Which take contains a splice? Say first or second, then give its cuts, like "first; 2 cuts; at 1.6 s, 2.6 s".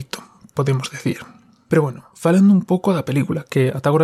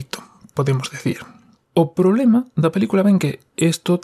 second; 1 cut; at 1.5 s